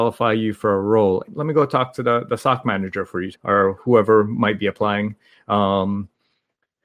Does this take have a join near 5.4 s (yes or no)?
no